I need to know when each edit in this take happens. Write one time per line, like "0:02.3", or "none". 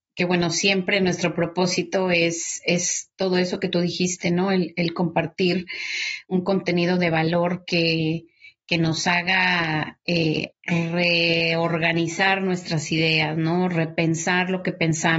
0:10.5